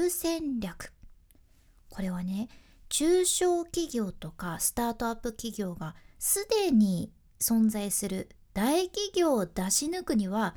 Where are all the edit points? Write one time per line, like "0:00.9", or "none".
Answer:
none